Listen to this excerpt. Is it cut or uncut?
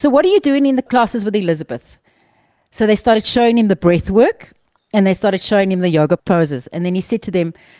uncut